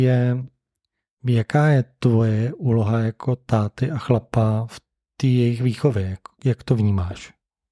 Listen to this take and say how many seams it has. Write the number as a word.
zero